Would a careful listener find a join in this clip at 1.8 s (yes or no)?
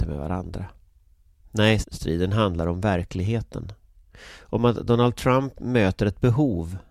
yes